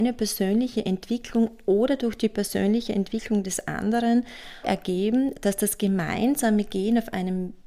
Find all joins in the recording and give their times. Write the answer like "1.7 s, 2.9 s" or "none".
4.6 s

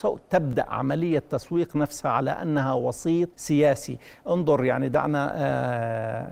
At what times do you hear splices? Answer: 3.3 s

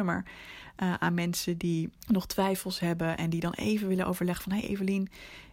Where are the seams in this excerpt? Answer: 2.0 s

